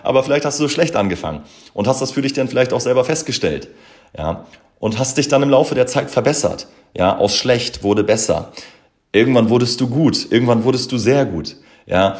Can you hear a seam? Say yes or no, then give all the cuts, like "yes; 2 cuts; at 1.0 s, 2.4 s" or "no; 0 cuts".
no; 0 cuts